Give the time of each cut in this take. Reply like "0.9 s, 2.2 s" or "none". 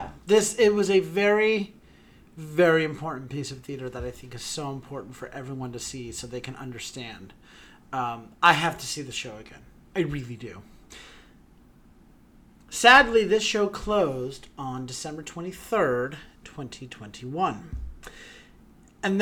none